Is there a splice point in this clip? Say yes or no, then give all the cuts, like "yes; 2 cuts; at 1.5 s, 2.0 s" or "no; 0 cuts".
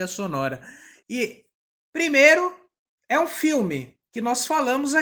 yes; 1 cut; at 1.0 s